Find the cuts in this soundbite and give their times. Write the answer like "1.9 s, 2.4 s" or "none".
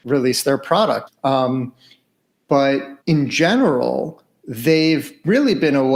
1.1 s, 3.0 s